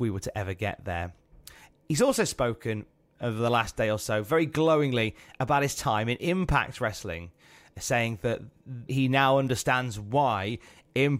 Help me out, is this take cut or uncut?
cut